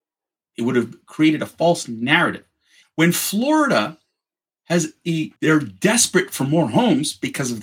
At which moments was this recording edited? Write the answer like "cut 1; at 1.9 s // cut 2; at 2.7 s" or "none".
cut 1; at 2.8 s // cut 2; at 5.4 s